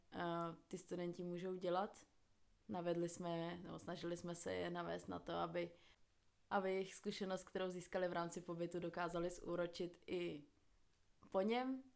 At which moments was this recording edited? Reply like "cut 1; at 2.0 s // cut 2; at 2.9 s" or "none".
none